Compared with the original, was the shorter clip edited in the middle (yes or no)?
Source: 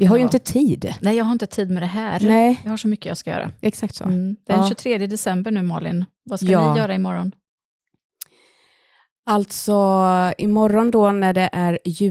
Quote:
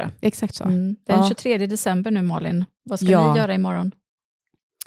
no